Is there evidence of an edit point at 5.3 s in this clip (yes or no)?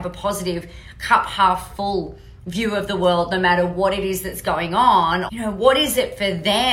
yes